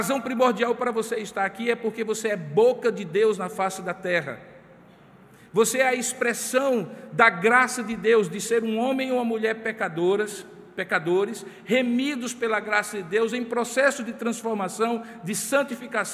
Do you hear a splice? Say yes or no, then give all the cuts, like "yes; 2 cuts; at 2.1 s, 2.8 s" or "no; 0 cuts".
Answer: no; 0 cuts